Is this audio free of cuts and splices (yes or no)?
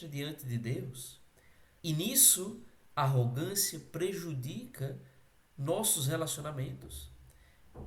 no